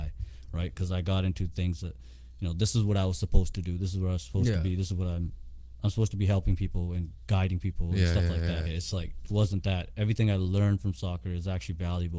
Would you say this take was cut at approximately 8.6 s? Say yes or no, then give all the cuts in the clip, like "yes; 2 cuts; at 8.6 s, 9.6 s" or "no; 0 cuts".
yes; 1 cut; at 8.6 s